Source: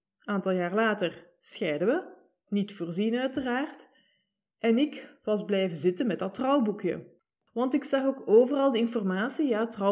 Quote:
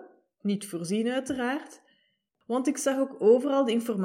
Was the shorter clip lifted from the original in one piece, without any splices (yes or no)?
no